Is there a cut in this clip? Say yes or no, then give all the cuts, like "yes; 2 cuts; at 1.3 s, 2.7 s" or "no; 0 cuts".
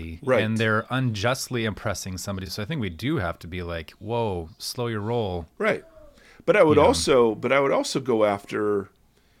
no; 0 cuts